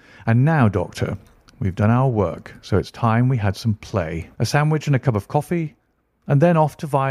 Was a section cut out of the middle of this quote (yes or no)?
yes